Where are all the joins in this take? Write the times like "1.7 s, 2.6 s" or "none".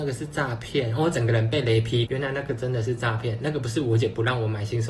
2.1 s